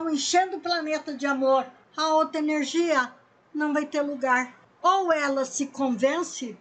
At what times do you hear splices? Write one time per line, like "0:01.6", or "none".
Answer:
none